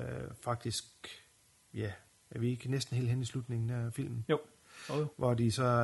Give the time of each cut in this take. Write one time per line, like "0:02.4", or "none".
none